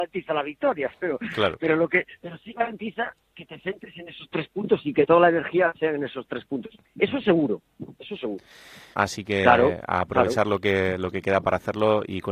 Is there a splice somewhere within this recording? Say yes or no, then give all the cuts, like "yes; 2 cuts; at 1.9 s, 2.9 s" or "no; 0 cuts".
yes; 1 cut; at 8.9 s